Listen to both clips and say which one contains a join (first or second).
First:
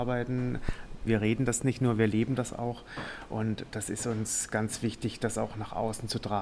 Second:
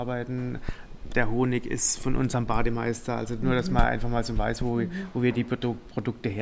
first